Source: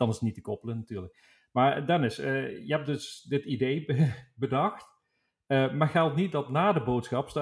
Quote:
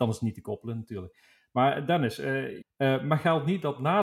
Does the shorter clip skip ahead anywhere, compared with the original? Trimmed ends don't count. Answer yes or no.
yes